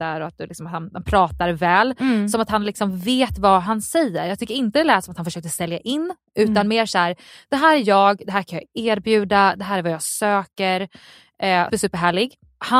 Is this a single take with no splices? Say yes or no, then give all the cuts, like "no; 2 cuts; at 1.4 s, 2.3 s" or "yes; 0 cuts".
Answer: no; 1 cut; at 11.7 s